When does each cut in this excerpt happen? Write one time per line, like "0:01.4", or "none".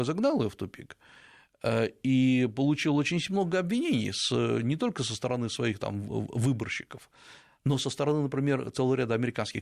none